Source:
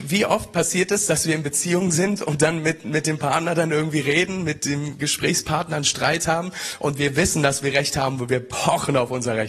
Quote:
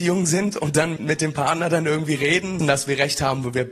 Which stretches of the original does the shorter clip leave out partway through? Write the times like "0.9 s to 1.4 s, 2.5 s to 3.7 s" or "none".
2.6 s to 2.8 s, 4.4 s to 7.3 s